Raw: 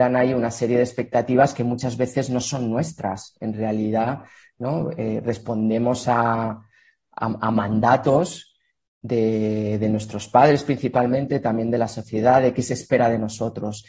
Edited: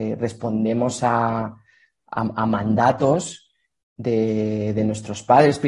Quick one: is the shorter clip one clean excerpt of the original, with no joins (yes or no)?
yes